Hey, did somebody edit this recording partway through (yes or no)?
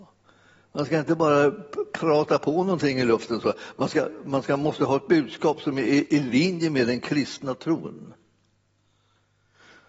no